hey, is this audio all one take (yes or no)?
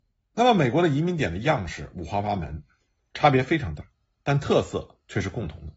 yes